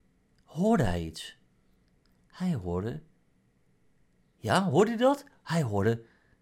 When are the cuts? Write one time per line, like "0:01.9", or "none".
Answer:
none